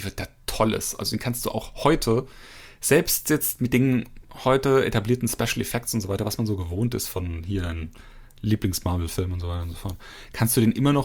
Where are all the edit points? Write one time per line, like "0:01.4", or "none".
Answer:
none